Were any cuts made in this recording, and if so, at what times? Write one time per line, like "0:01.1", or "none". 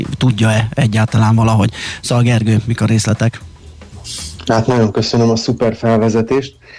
none